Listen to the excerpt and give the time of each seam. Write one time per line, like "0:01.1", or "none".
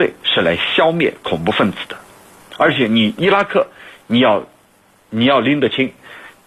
none